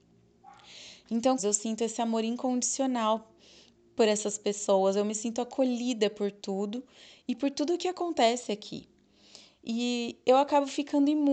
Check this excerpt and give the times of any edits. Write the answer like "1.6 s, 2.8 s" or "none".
1.4 s